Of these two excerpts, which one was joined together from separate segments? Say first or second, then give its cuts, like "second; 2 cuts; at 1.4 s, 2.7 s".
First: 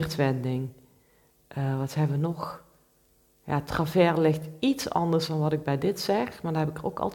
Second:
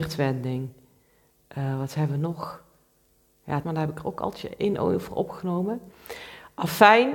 second; 1 cut; at 3.6 s